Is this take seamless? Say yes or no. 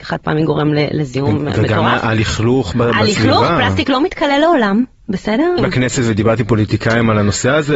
no